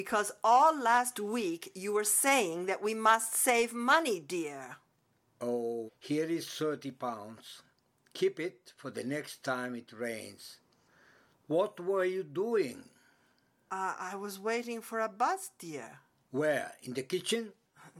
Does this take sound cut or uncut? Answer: cut